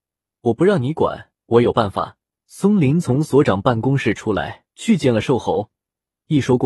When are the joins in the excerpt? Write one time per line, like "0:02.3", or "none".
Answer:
0:02.4
0:04.7